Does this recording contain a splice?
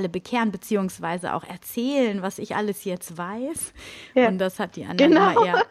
no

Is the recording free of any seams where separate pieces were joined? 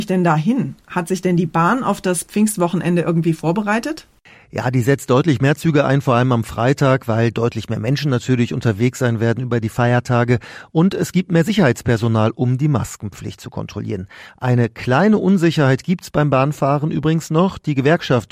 yes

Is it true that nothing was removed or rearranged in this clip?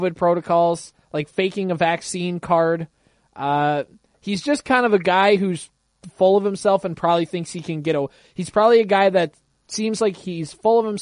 yes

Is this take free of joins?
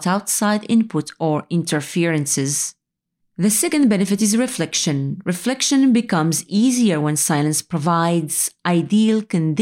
no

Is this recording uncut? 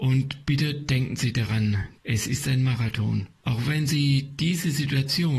no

